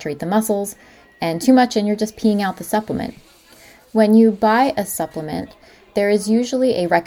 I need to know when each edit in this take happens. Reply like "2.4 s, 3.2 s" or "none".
none

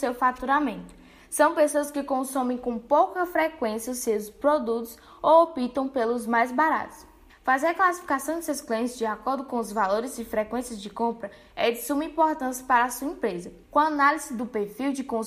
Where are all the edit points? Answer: 7.3 s, 13.6 s

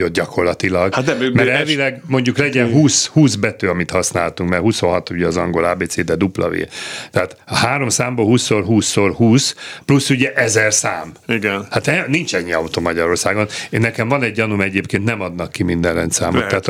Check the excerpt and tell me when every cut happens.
none

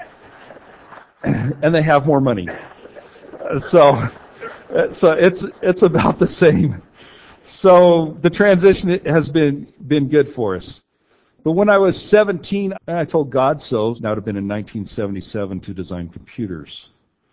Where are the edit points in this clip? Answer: 12.7 s, 14.0 s

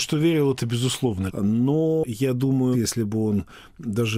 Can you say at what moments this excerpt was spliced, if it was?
1.3 s, 2.7 s

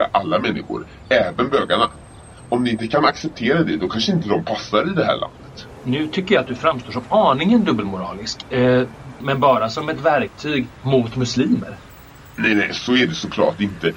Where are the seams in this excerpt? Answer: 9.2 s

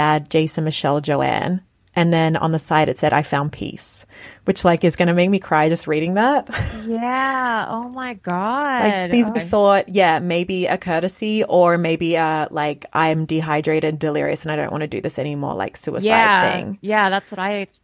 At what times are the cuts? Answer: 9.3 s

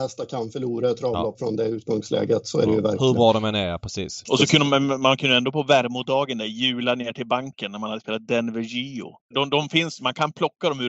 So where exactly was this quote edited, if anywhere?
4.2 s, 9.3 s

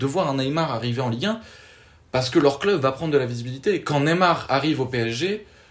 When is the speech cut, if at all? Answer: none

